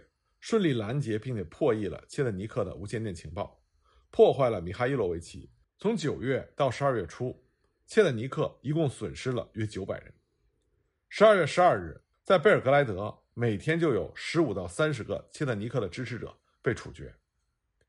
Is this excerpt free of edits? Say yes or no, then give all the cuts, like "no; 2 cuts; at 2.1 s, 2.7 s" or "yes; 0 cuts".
no; 2 cuts; at 5.6 s, 12.1 s